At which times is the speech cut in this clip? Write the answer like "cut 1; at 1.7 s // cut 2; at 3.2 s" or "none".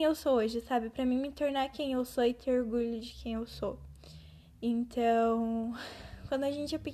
none